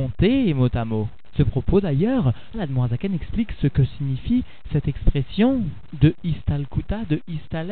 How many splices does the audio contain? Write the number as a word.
two